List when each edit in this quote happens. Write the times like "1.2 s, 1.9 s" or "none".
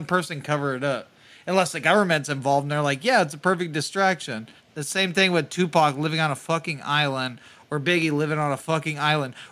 4.6 s